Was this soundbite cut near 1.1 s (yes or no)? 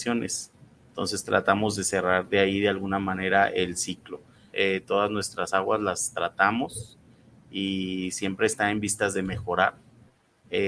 no